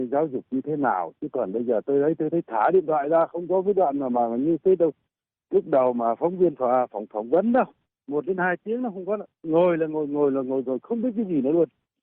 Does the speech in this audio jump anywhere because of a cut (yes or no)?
no